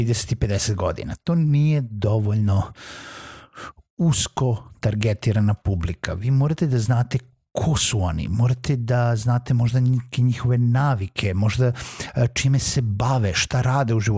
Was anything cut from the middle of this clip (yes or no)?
no